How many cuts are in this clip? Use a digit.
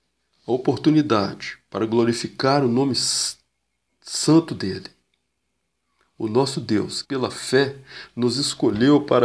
1